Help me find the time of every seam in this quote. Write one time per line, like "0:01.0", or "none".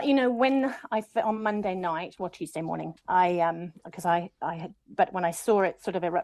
0:04.9